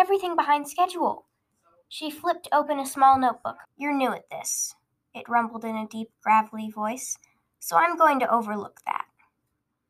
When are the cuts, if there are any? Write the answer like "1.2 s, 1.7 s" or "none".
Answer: 3.6 s